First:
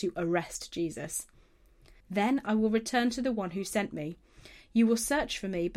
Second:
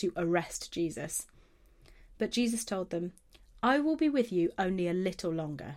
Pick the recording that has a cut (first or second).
first